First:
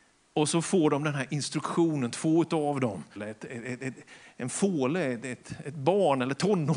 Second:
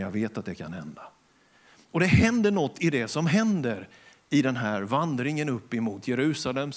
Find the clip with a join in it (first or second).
first